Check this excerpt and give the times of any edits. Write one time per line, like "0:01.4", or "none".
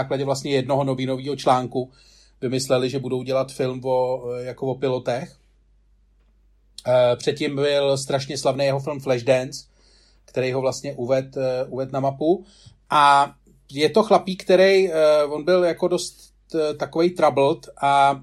none